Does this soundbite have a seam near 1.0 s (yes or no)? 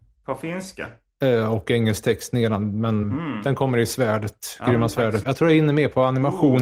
no